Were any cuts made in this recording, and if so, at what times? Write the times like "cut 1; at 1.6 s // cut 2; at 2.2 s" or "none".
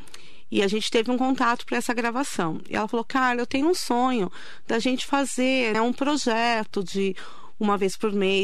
cut 1; at 5.7 s